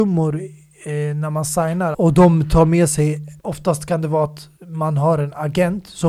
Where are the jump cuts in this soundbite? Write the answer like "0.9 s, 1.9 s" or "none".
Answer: 1.9 s, 3.4 s, 4.6 s